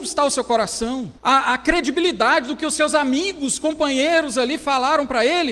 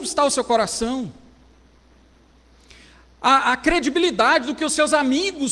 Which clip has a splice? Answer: first; 1 cut; at 1.2 s

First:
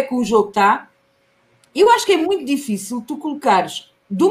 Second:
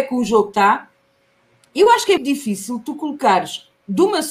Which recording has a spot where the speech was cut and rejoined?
second; 1 cut; at 2.2 s

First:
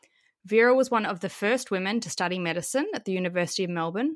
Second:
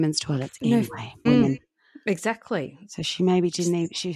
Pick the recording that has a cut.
second; 1 cut; at 1.3 s

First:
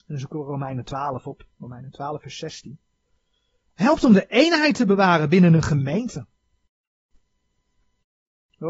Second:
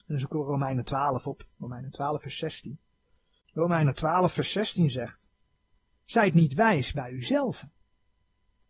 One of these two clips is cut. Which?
second; 2 cuts; at 3.4 s, 5.9 s

